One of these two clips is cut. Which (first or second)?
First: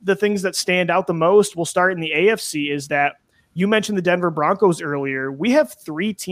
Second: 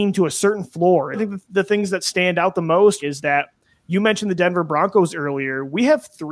second